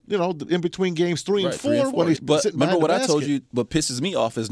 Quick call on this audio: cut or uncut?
cut